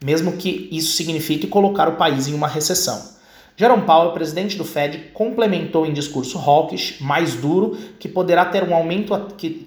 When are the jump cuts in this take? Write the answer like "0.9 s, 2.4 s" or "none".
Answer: none